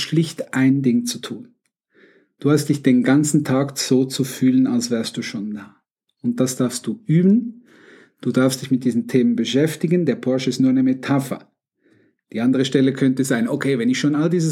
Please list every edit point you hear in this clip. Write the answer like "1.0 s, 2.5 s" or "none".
none